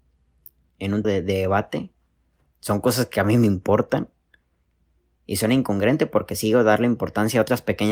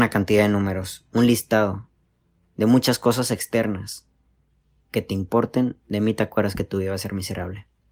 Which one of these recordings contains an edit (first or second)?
first